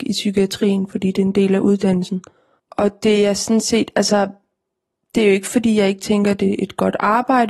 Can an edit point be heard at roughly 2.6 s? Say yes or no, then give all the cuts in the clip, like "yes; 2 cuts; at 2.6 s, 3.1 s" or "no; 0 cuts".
yes; 1 cut; at 2.6 s